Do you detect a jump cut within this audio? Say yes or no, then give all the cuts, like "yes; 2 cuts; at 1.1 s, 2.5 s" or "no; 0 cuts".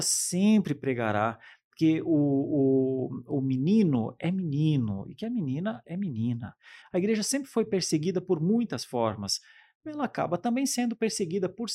yes; 1 cut; at 6.8 s